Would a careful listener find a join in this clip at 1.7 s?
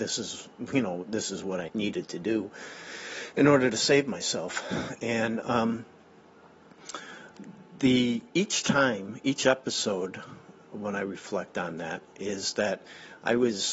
yes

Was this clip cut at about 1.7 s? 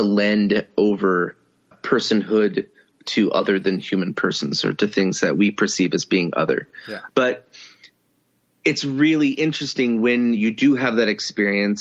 yes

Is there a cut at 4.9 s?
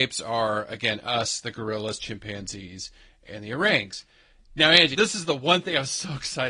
yes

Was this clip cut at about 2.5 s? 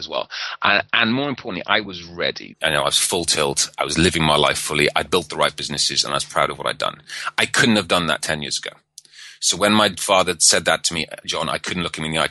yes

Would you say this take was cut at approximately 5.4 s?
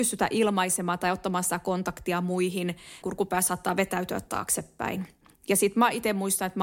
no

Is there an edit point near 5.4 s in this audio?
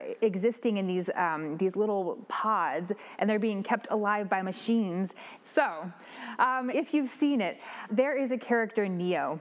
yes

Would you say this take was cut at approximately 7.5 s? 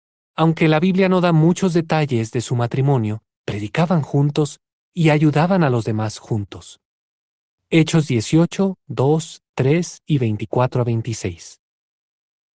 no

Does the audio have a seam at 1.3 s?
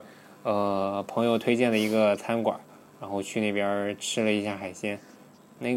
no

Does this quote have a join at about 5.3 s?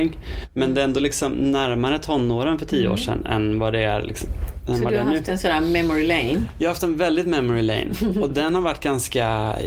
no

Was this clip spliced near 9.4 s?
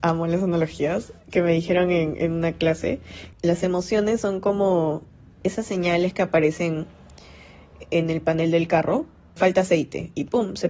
yes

